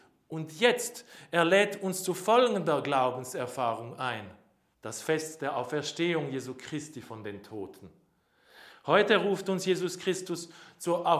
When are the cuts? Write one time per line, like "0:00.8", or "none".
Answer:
0:04.7